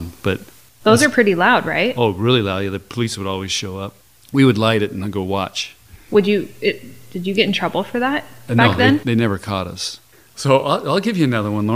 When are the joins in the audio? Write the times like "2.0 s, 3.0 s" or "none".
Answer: none